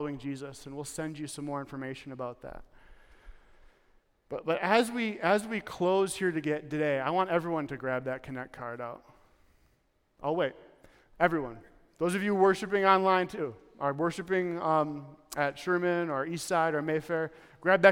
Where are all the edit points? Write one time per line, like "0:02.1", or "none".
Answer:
none